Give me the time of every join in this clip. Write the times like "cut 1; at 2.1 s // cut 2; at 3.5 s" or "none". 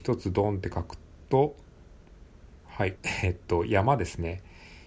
cut 1; at 2.9 s